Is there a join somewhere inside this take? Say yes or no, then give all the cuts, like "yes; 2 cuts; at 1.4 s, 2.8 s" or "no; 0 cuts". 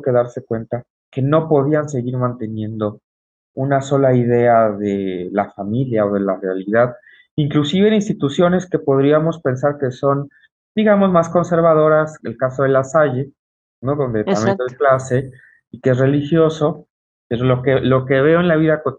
yes; 1 cut; at 12.2 s